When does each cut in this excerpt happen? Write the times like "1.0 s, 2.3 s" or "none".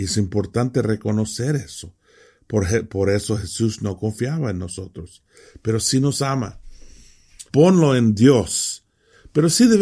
7.5 s

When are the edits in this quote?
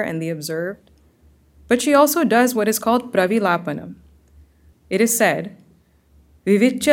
4.7 s

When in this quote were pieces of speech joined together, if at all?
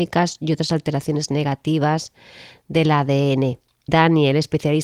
3.9 s

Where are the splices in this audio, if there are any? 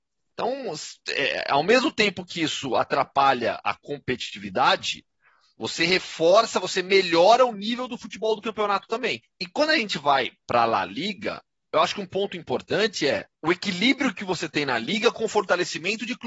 9.2 s, 13.3 s

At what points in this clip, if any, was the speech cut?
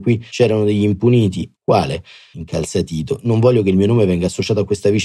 1.6 s

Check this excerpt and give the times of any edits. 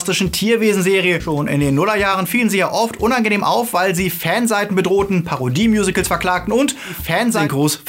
1.2 s

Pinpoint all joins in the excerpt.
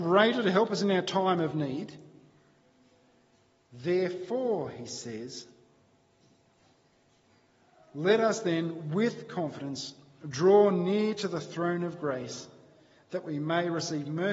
none

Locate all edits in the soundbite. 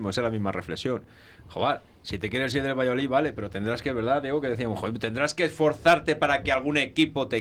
none

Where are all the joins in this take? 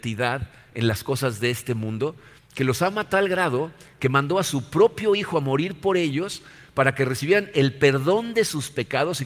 2.4 s

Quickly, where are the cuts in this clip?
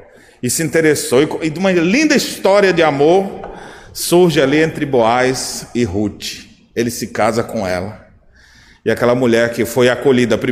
none

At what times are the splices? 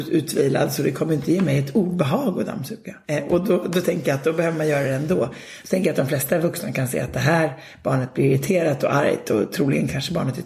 3.0 s, 5.6 s

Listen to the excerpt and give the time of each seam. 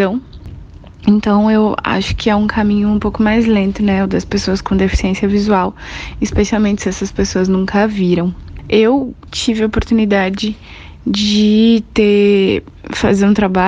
9.3 s

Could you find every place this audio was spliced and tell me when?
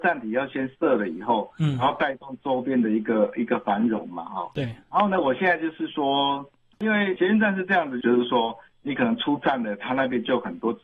6.7 s, 8.0 s

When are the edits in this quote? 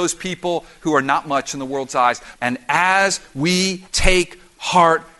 2.3 s, 3.9 s

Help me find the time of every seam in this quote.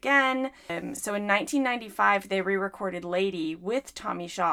none

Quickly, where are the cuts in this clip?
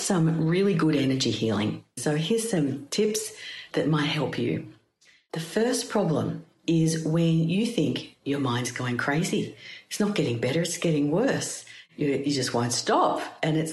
2.0 s

